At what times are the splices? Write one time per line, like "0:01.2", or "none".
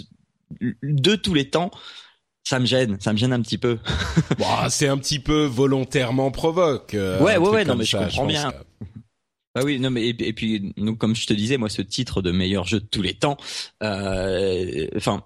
0:08.5